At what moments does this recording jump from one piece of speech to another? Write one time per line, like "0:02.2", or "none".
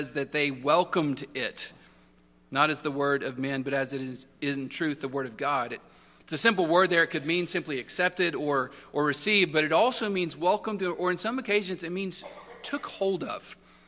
none

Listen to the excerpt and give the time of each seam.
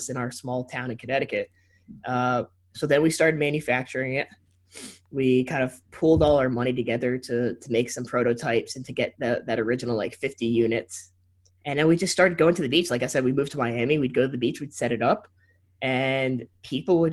none

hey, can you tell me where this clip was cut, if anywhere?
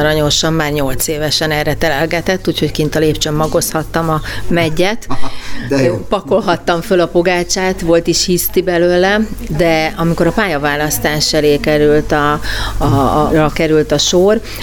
0:13.3

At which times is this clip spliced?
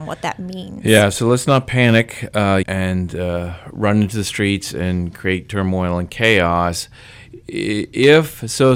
0:02.6

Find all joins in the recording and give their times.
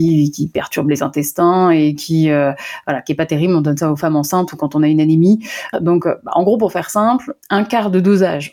0:05.7
0:07.4

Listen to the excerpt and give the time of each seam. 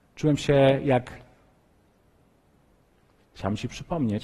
0:03.2

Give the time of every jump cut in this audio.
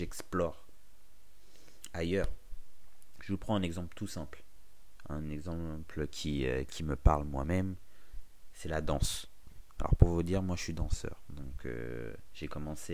none

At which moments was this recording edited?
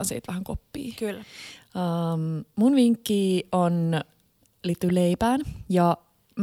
none

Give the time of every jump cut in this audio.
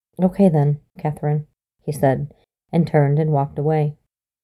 0:01.0

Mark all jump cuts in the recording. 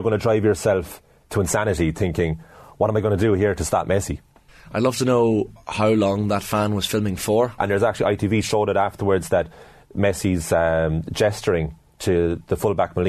0:07.6

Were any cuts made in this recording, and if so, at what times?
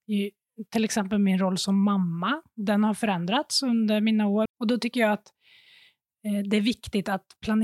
0:04.5

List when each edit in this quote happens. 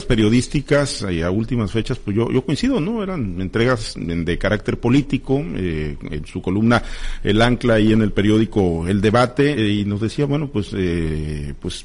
0:09.5

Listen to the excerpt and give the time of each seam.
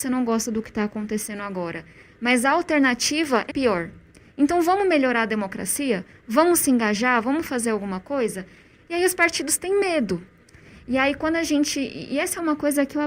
0:03.5

